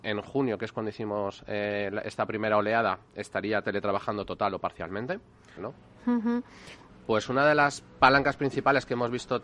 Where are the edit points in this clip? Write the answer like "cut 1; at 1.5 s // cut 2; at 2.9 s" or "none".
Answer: cut 1; at 5.6 s // cut 2; at 6.9 s